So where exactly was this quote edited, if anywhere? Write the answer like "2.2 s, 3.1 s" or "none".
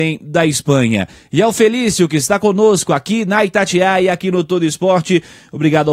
none